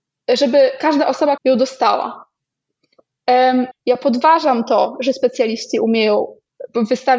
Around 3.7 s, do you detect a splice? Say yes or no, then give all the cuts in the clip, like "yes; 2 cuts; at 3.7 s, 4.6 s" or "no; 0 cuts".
yes; 2 cuts; at 1.4 s, 3.7 s